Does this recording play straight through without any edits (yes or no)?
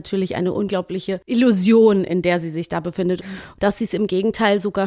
no